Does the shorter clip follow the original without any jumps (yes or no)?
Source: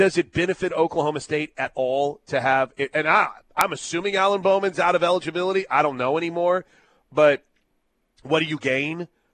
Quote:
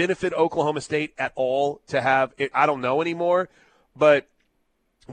no